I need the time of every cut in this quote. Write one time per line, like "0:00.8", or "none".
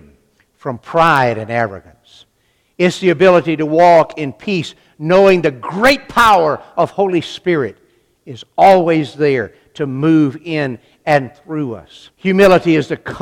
0:12.1